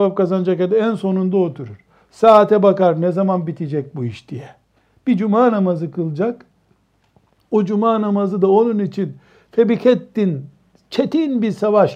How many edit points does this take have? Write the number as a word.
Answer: zero